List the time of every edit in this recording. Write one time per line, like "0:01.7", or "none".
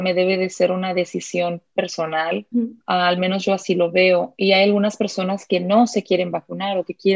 0:02.5

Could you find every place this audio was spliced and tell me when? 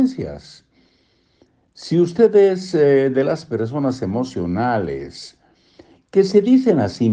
none

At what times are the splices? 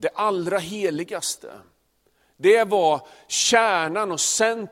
none

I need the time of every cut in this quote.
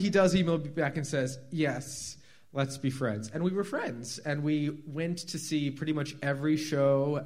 none

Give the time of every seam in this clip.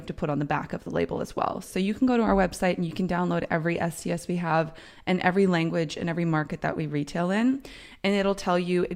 0:01.6

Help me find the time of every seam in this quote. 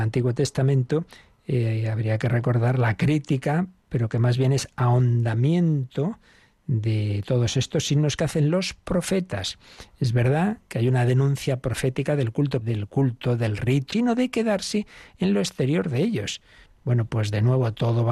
0:12.6
0:13.9
0:16.7

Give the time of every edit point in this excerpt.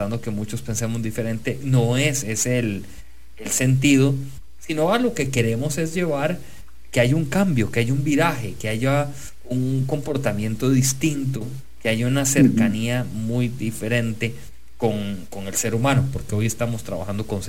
none

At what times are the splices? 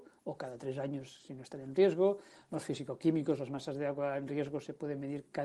none

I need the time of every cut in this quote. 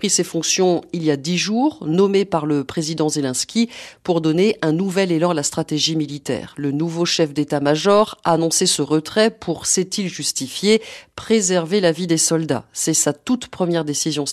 0:06.5

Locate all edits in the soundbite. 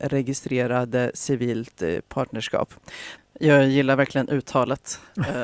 0:03.2

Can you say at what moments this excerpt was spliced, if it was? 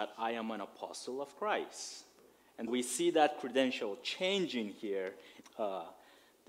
0:02.7
0:05.4

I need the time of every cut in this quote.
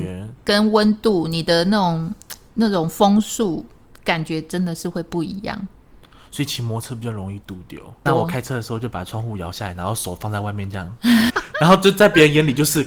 0:08.1
0:11.3

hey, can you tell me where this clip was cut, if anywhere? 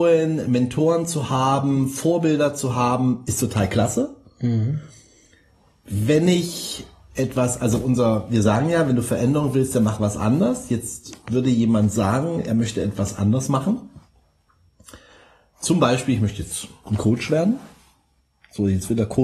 none

